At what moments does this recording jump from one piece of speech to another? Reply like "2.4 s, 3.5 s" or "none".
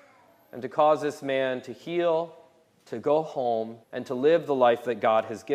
3.8 s